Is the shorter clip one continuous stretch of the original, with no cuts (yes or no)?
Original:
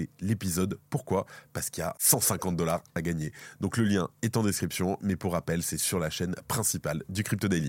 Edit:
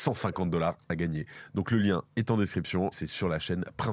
no